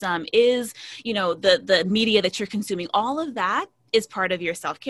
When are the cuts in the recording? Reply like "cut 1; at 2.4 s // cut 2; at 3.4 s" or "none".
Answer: none